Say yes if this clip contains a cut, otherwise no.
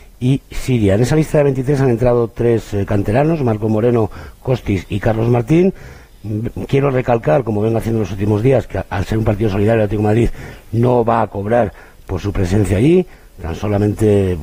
no